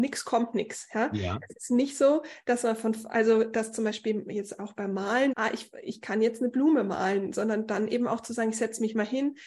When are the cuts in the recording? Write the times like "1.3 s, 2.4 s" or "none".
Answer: 5.3 s